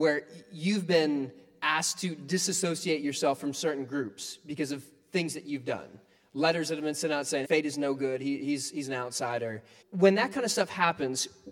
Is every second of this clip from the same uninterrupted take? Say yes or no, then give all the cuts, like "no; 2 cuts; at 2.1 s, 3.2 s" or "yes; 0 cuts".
no; 2 cuts; at 7.4 s, 9.8 s